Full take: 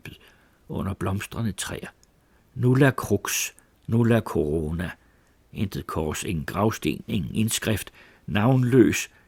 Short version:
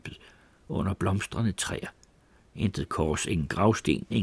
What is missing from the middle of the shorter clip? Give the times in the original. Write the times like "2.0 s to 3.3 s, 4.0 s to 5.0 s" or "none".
2.5 s to 5.4 s